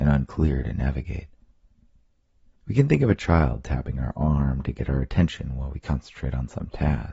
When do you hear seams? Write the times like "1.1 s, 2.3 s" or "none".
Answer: 2.6 s